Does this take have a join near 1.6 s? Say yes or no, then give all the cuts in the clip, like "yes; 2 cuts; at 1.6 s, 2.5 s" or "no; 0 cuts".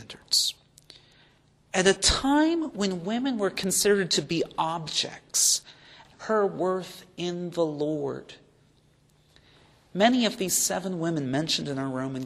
no; 1 cut; at 6.1 s